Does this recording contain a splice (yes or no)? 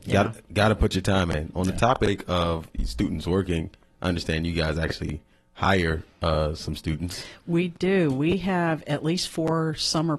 no